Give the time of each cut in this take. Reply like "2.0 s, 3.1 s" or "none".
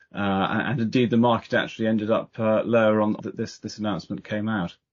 3.2 s